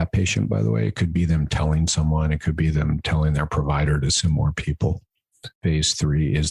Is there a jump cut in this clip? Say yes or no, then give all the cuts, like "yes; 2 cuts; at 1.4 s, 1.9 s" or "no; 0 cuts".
yes; 1 cut; at 5.5 s